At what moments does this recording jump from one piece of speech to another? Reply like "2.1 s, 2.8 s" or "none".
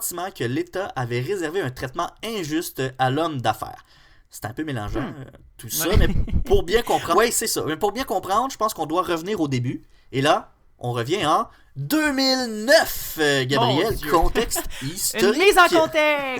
7.1 s

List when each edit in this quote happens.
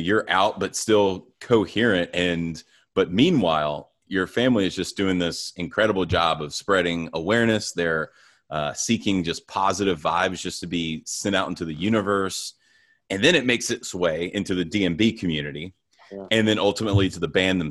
none

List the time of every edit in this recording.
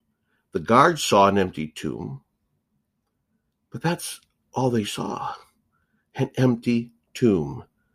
none

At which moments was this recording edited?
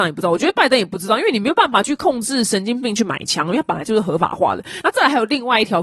none

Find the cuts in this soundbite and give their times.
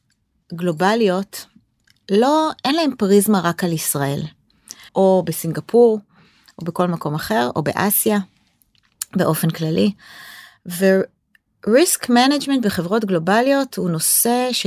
4.9 s

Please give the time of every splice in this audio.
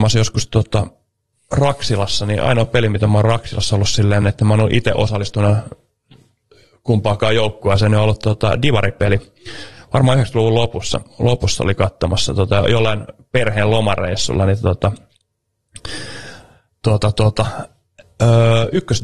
none

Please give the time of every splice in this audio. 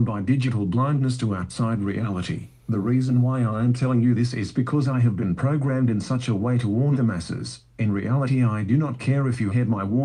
none

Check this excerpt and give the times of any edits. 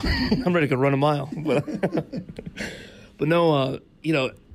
none

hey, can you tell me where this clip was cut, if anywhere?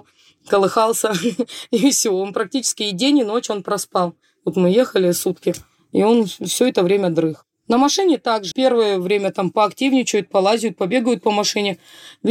8.5 s

